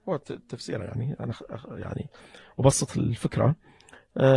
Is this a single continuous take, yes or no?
yes